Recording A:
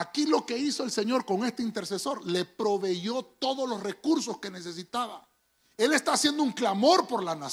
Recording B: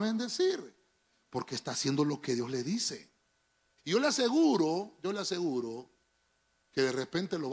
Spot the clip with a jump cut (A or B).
B